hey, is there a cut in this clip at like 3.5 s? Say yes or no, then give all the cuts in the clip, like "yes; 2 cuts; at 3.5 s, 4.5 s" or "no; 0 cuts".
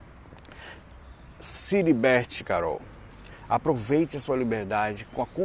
no; 0 cuts